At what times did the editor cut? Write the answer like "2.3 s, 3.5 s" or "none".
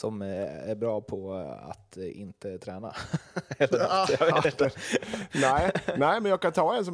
none